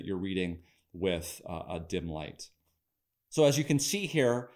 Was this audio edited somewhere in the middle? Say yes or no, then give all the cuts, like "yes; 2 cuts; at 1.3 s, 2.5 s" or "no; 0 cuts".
no; 0 cuts